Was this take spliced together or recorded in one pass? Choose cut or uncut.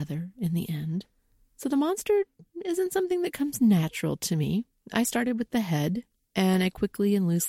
uncut